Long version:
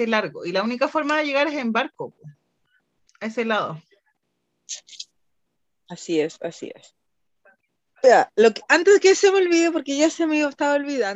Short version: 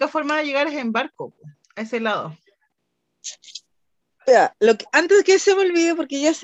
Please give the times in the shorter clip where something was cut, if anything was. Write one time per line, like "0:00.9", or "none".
0:01.6
0:04.1